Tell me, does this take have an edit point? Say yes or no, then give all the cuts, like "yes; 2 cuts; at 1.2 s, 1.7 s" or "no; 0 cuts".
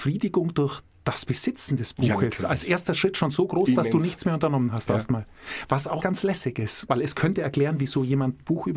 yes; 1 cut; at 6.0 s